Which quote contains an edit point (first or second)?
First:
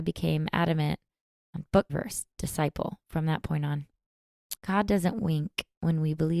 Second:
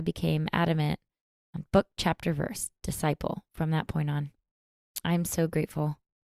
first